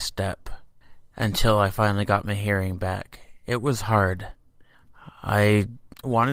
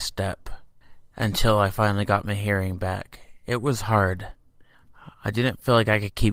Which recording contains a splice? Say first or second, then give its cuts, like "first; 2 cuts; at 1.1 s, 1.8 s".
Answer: second; 1 cut; at 5.1 s